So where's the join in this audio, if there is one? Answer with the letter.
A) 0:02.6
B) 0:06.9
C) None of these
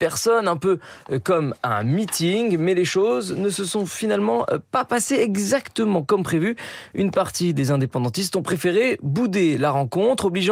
C